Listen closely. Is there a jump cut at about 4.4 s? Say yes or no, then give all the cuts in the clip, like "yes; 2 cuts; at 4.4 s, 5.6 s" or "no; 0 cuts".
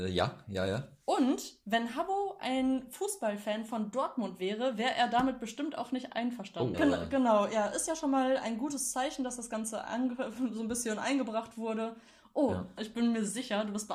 no; 2 cuts; at 6.7 s, 12.8 s